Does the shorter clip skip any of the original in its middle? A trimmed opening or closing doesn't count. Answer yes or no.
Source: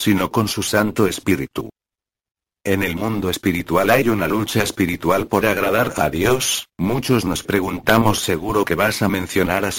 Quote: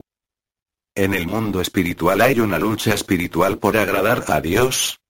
no